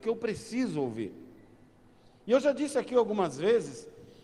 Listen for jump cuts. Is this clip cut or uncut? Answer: uncut